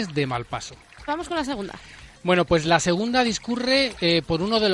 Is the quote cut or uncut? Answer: cut